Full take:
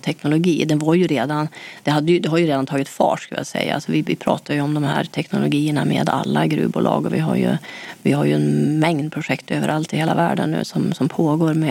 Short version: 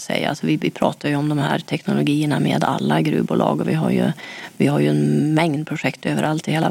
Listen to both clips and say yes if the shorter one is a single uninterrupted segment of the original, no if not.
yes